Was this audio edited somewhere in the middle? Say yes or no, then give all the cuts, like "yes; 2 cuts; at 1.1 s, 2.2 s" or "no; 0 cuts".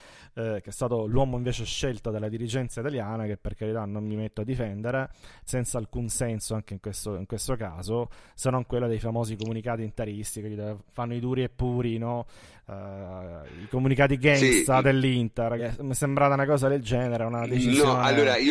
yes; 2 cuts; at 5.5 s, 15.6 s